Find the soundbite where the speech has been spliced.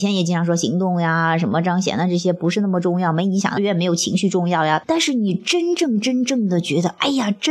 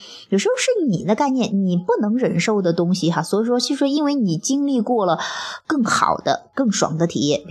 first; 2 cuts; at 3.6 s, 4.8 s

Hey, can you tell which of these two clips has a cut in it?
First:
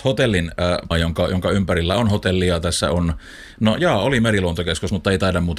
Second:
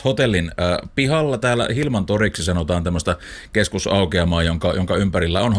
first; 1 cut; at 0.9 s

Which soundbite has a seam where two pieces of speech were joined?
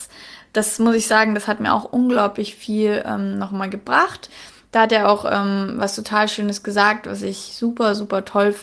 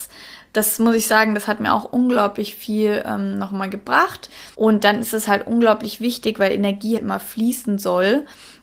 second; 2 cuts; at 4.5 s, 7.0 s

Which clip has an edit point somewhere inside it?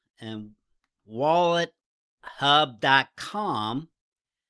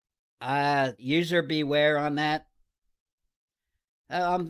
second; 1 cut; at 1.0 s

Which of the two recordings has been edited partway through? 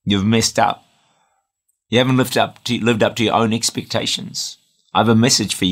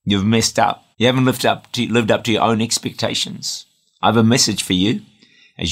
second; 1 cut; at 0.9 s

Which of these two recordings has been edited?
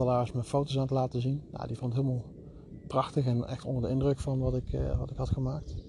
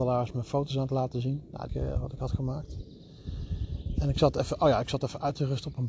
second; 1 cut; at 1.7 s

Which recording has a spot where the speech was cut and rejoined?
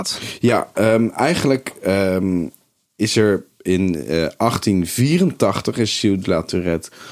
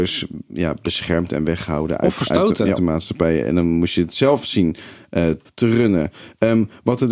second; 2 cuts; at 2.8 s, 5.4 s

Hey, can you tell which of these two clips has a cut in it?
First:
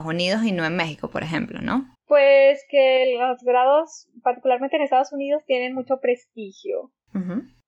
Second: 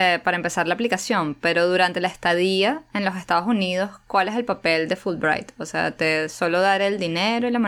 first; 1 cut; at 1.9 s

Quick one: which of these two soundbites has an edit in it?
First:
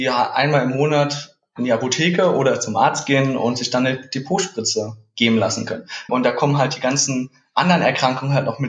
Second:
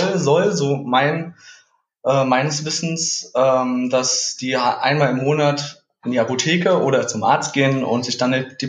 first; 1 cut; at 6.1 s

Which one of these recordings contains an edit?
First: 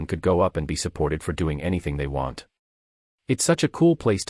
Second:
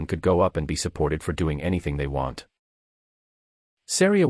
first; 1 cut; at 3.1 s

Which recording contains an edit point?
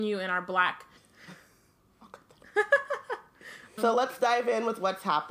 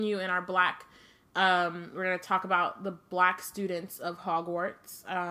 first; 2 cuts; at 1.0 s, 3.8 s

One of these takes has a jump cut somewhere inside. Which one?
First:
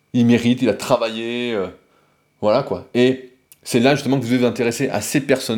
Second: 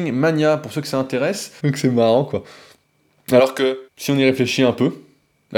second; 2 cuts; at 1.6 s, 3.9 s

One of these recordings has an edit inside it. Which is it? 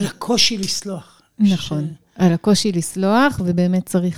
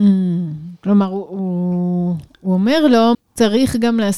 second; 2 cuts; at 1.3 s, 3.1 s

